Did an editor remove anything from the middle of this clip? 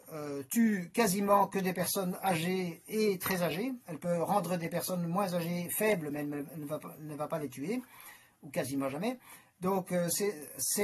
no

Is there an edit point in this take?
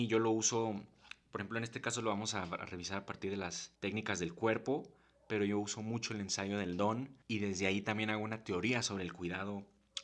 yes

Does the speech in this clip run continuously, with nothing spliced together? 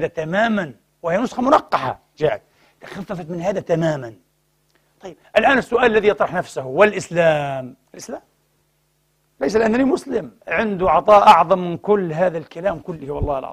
no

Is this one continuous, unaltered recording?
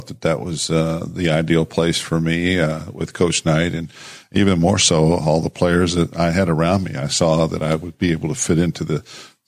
yes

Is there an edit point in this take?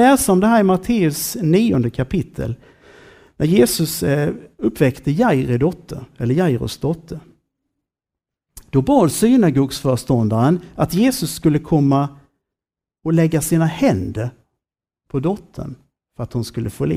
no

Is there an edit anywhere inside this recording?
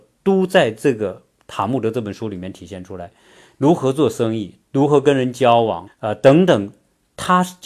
yes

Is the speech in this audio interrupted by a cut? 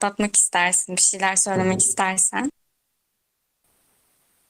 no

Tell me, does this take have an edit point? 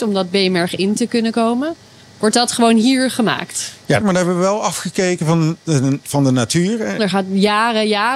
yes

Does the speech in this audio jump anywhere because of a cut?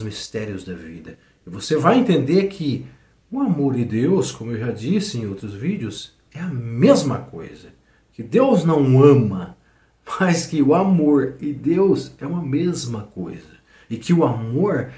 no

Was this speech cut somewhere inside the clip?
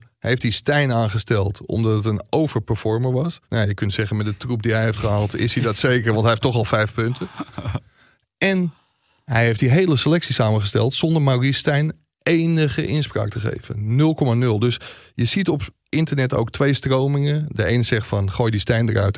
yes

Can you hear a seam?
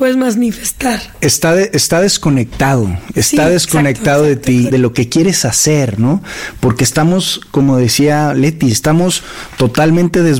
no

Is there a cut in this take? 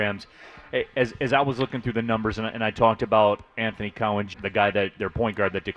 yes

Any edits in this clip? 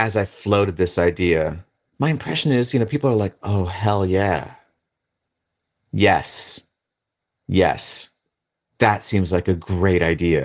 no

